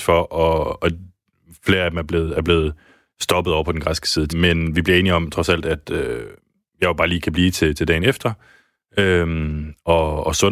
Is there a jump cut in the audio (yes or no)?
yes